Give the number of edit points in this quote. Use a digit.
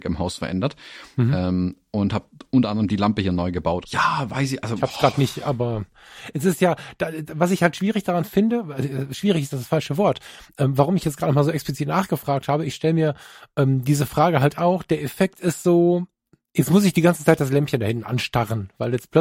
1